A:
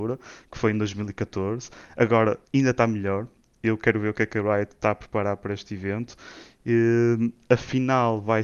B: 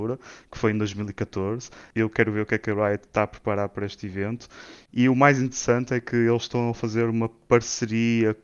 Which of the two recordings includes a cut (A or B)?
B